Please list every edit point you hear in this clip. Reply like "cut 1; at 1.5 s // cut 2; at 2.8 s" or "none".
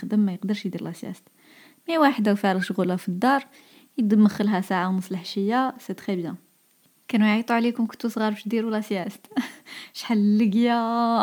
none